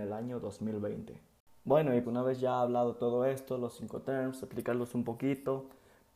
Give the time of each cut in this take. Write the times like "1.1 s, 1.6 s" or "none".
2.0 s